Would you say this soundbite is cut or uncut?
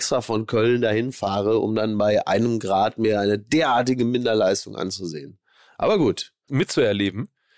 cut